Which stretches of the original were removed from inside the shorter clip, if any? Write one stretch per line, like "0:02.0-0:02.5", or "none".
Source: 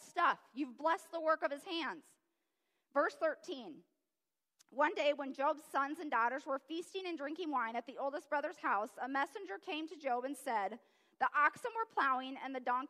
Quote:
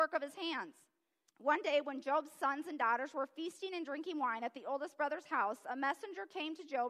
0:02.6-0:04.6